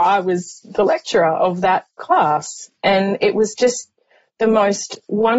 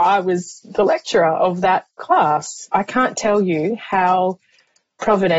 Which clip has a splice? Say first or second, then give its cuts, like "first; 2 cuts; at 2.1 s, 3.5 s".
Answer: second; 1 cut; at 2.7 s